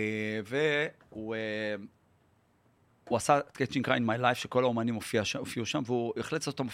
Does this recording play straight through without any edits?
yes; 0 cuts

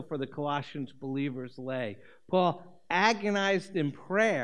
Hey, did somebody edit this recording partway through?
no; 0 cuts

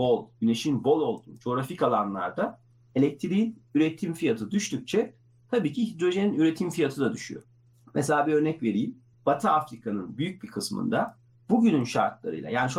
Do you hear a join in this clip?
no; 0 cuts

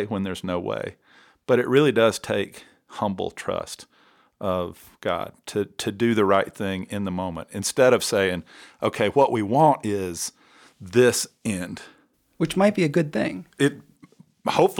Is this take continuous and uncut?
yes; 0 cuts

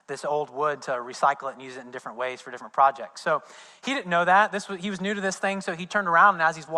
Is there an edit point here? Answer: no; 0 cuts

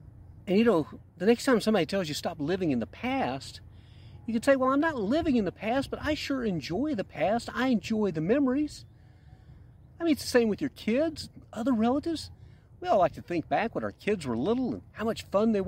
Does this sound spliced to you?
yes; 1 cut; at 1.1 s

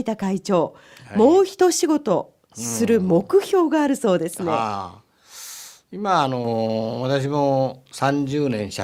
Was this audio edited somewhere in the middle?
no; 0 cuts

